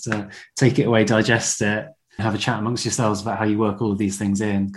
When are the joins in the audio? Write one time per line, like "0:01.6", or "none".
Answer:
0:02.2